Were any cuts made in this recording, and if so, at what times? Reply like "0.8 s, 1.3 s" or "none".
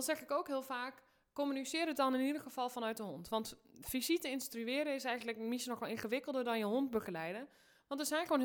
none